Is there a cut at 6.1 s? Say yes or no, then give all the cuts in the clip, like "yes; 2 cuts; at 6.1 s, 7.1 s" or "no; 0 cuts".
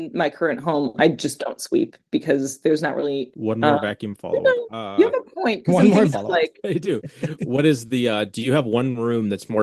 yes; 2 cuts; at 3.3 s, 6.1 s